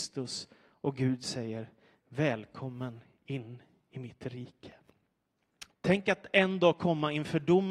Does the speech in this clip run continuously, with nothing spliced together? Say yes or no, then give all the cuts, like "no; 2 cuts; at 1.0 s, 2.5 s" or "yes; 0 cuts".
no; 1 cut; at 5.7 s